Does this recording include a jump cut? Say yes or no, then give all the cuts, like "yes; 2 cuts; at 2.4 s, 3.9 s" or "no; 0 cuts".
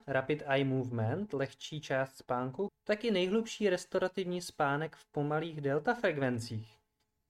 yes; 1 cut; at 2.7 s